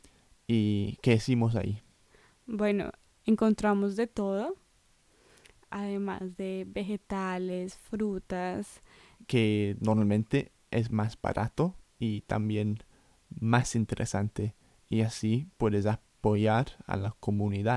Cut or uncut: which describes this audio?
cut